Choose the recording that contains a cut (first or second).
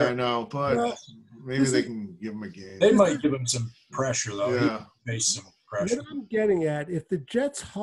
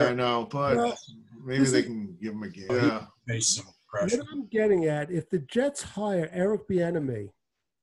second